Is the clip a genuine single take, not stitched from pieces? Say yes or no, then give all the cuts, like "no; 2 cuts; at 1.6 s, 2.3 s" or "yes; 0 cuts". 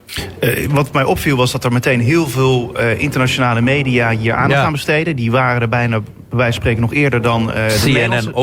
yes; 0 cuts